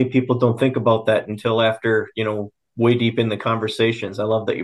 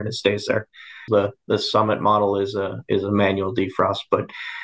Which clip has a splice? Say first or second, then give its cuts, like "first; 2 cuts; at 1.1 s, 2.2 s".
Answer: second; 1 cut; at 1.1 s